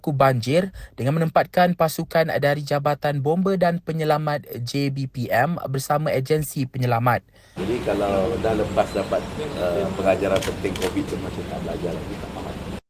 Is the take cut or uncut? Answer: cut